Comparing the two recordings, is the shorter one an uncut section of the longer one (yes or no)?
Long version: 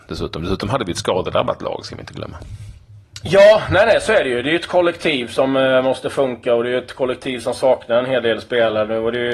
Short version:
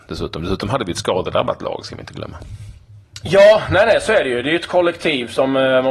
yes